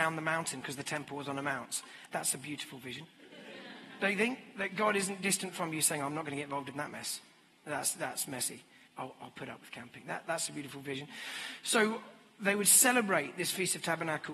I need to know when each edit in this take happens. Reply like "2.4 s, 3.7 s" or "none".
2.1 s, 8.9 s